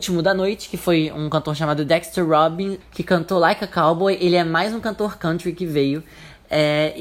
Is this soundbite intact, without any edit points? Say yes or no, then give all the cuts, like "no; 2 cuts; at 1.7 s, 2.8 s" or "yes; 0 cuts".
no; 1 cut; at 2.8 s